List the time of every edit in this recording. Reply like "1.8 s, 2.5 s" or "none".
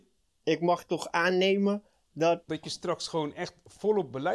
2.5 s